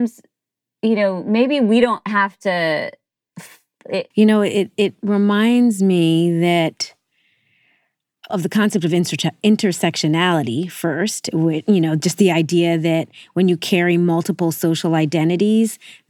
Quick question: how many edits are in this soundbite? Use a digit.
2